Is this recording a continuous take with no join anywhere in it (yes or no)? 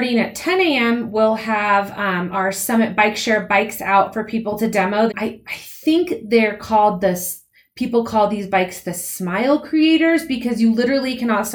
no